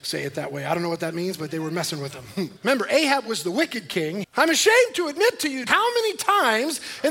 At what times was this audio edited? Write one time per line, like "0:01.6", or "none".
0:02.6
0:04.2
0:05.7